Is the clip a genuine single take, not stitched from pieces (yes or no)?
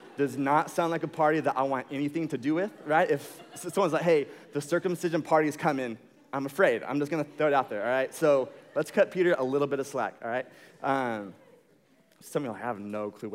yes